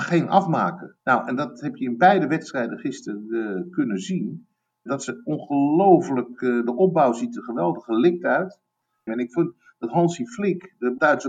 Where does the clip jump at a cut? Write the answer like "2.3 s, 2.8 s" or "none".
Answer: 1.0 s, 9.1 s